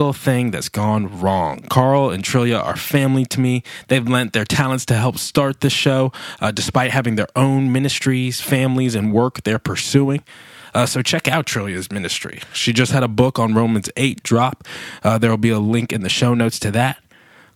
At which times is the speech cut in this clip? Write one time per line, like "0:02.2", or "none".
none

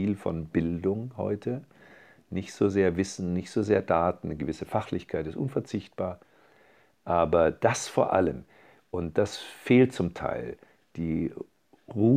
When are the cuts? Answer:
none

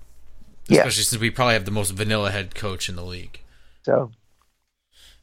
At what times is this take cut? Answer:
0:03.8

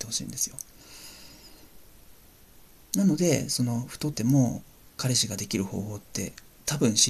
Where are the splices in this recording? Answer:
0:04.1

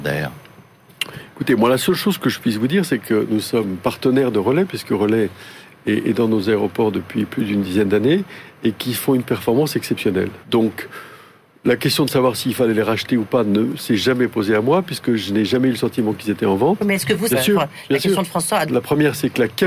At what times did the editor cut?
0:10.4
0:17.3
0:18.7

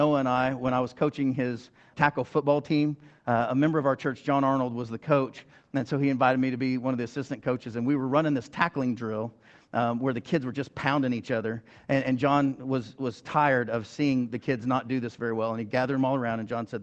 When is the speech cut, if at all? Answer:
0:01.9

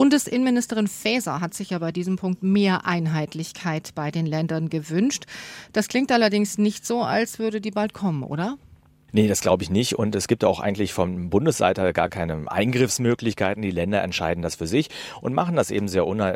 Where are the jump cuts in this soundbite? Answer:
none

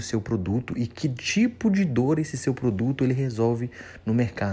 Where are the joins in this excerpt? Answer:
none

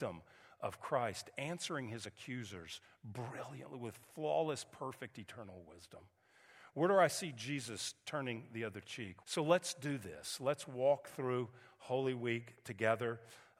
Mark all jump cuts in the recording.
0:09.2

